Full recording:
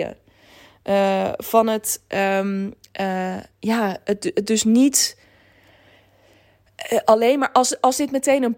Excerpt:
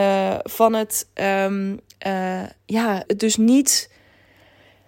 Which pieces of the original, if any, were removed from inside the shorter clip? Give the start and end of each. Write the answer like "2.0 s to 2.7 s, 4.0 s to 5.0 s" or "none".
4.0 s to 4.3 s